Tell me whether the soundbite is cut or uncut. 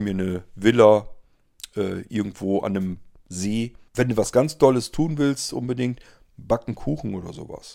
cut